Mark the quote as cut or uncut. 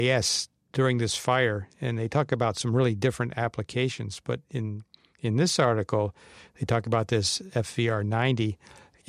uncut